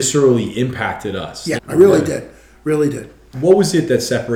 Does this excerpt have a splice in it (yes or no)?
yes